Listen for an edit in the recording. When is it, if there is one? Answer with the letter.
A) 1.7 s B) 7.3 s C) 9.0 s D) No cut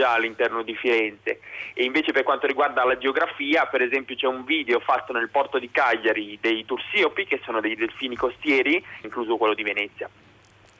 C